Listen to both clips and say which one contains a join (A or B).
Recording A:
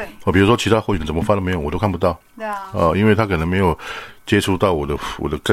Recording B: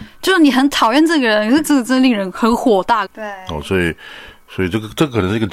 B